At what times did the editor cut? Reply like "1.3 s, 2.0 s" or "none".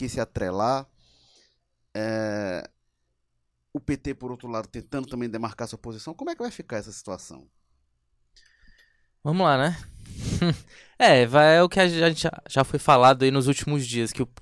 none